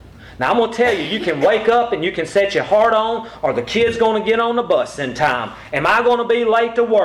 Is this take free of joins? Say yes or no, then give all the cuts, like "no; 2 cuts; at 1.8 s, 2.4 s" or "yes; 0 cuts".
yes; 0 cuts